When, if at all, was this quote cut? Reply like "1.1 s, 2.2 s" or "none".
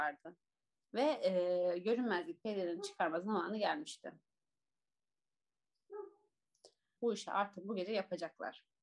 7.0 s

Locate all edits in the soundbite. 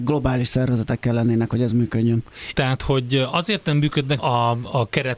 2.5 s, 4.2 s

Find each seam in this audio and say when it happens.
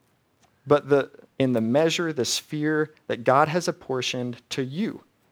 1.3 s

